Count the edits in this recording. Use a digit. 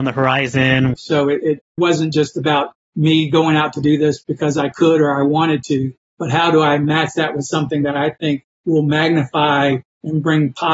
1